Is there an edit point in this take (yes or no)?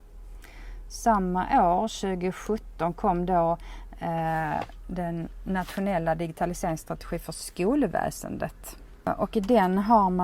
no